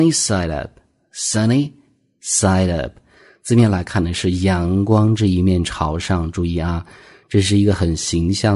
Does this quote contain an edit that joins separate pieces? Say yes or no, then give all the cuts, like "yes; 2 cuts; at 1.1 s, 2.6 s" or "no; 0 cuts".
no; 0 cuts